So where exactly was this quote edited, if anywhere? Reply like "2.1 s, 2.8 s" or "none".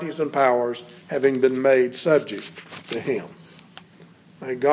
none